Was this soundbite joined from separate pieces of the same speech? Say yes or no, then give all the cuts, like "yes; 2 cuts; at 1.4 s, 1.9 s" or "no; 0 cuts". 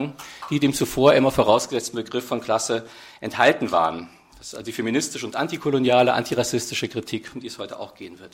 no; 0 cuts